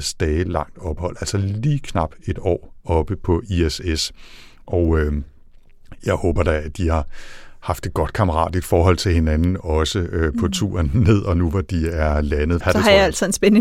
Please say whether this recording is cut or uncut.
cut